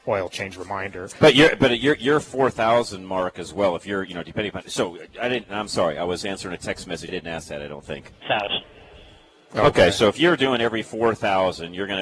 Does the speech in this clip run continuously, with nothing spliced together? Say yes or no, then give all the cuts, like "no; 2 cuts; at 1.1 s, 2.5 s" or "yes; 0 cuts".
no; 2 cuts; at 7.1 s, 8.2 s